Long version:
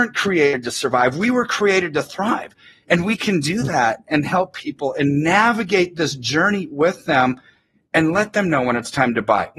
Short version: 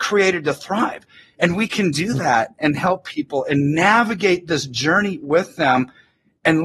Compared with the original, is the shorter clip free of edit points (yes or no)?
yes